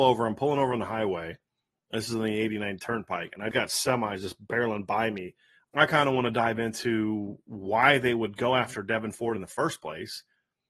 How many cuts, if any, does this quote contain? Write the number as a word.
two